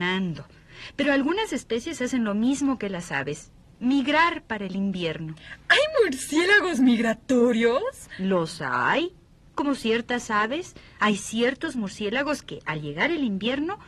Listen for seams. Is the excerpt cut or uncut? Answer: uncut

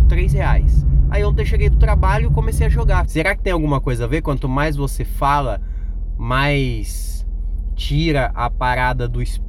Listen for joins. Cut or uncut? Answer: cut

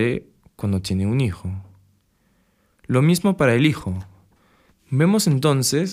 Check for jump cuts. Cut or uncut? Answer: cut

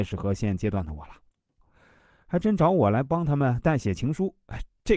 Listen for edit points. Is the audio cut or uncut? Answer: cut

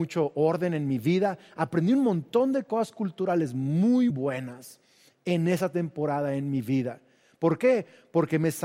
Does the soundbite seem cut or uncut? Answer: cut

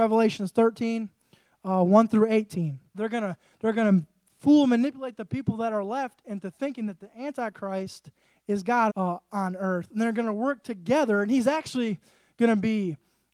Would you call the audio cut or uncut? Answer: cut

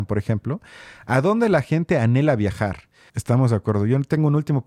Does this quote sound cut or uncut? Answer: cut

